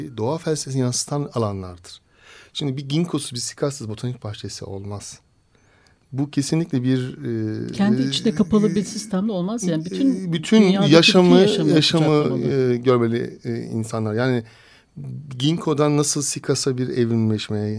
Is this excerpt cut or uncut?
uncut